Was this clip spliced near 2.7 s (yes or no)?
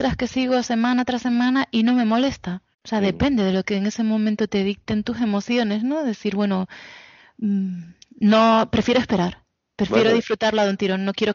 yes